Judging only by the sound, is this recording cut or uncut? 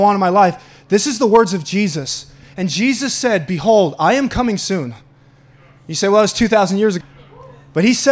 cut